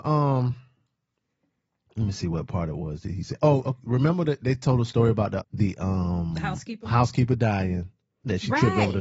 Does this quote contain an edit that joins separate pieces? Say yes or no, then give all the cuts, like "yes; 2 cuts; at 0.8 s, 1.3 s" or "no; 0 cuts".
yes; 1 cut; at 5.4 s